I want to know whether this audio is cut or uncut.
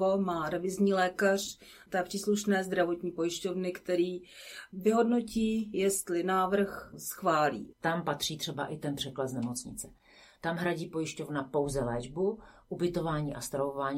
cut